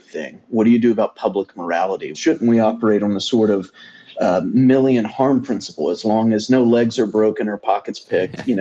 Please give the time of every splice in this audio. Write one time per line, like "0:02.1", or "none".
0:02.1